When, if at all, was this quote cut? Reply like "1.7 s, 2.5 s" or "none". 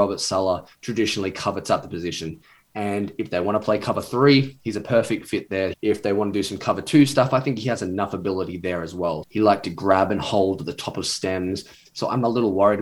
5.7 s, 9.2 s